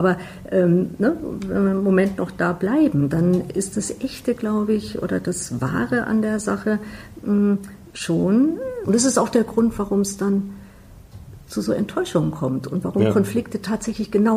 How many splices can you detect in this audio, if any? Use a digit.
1